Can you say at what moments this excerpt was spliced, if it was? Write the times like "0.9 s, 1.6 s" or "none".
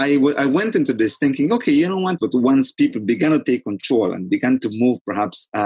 2.2 s